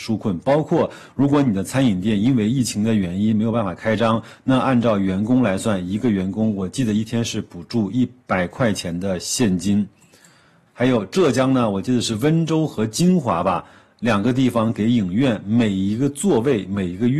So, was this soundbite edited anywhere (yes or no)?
yes